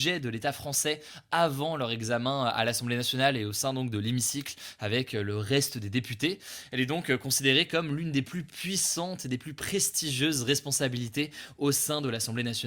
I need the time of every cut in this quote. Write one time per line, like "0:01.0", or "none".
none